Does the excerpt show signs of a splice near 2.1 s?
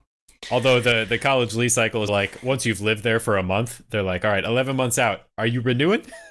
yes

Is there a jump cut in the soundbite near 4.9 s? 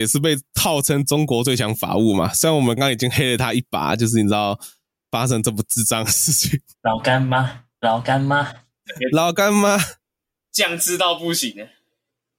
no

